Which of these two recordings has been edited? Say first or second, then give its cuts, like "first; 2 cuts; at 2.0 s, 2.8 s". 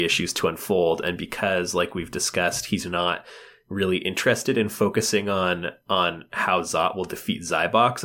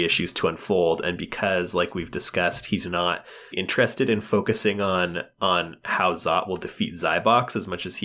second; 1 cut; at 3.5 s